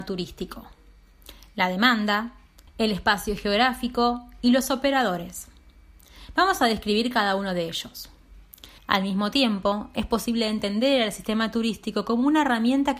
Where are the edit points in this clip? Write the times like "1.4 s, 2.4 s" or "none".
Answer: 2.7 s, 8.8 s